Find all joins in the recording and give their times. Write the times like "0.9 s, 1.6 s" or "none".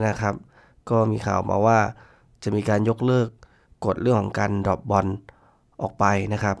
none